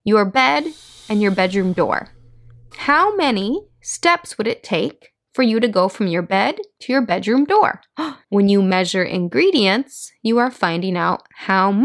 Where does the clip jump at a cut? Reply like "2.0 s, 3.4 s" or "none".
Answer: 2.7 s, 8.2 s